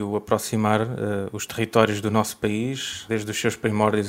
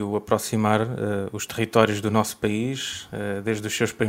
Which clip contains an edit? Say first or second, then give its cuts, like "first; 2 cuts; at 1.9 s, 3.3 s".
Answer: first; 1 cut; at 3.1 s